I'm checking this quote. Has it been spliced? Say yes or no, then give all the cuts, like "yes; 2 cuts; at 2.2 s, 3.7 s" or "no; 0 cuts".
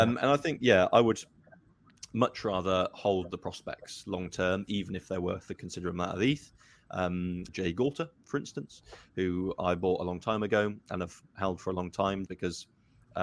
yes; 2 cuts; at 7.5 s, 12.3 s